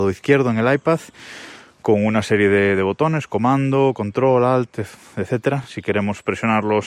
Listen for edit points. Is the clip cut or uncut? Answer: uncut